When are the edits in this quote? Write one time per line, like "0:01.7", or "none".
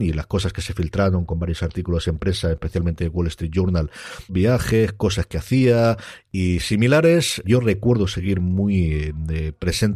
0:04.3
0:07.4